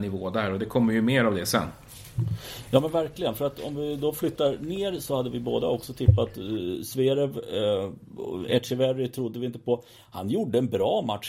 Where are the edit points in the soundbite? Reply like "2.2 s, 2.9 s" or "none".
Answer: none